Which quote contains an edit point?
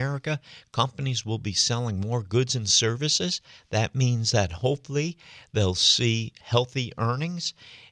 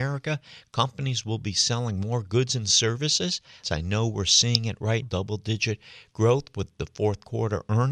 second; 2 cuts; at 3.6 s, 5.0 s

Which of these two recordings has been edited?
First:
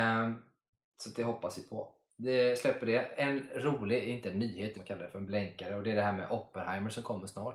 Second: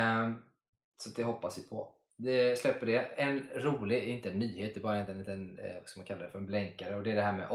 first; 1 cut; at 4.7 s

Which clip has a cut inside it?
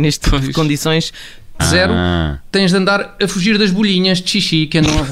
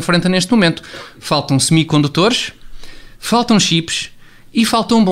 first; 1 cut; at 1.6 s

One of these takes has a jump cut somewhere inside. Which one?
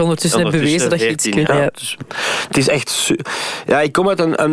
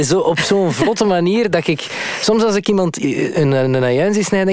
first; 1 cut; at 1.5 s

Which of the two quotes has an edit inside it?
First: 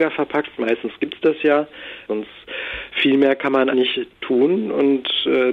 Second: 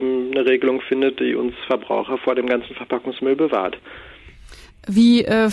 first; 2 cuts; at 2.1 s, 3.7 s

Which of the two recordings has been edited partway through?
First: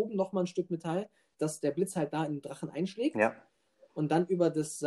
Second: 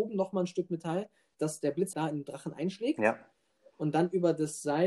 second; 1 cut; at 1.9 s

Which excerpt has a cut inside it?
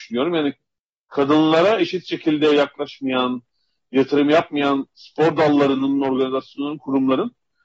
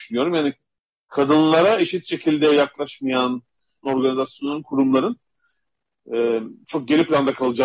second; 1 cut; at 3.8 s

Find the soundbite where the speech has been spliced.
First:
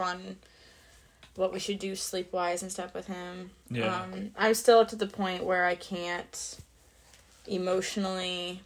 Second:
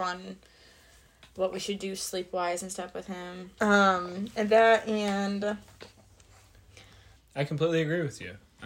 second; 2 cuts; at 3.6 s, 7.2 s

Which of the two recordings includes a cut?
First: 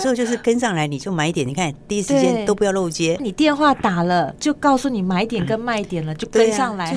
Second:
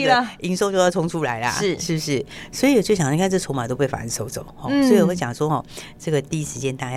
first; 1 cut; at 3.2 s

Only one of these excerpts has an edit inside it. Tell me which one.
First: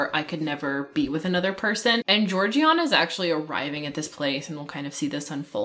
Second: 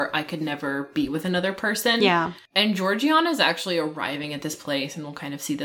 first; 1 cut; at 2.0 s

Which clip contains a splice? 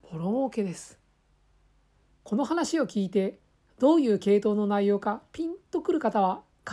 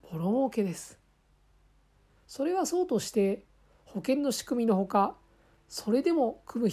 first; 1 cut; at 2.0 s

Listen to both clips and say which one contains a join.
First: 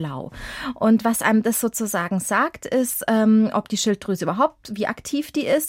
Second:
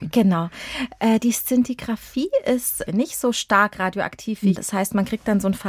second; 2 cuts; at 2.9 s, 4.5 s

